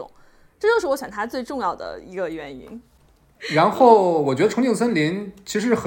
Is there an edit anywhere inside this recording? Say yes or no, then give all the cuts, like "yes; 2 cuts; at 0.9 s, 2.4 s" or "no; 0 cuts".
no; 0 cuts